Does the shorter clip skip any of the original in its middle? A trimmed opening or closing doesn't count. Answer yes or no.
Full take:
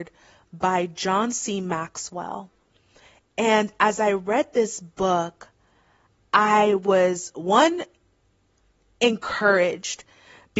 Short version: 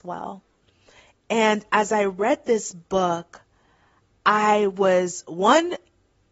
no